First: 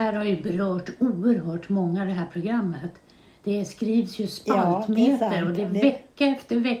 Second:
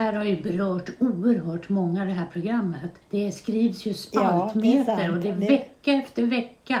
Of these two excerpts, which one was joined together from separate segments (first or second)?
second